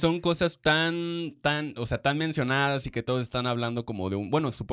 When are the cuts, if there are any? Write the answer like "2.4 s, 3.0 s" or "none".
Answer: none